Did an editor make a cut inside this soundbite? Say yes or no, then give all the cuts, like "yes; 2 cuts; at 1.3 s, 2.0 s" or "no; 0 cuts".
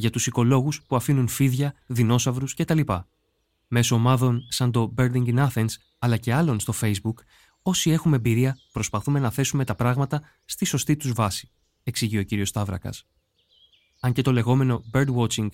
yes; 1 cut; at 1.8 s